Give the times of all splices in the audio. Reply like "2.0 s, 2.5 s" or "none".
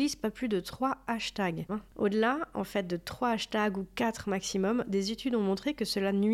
1.7 s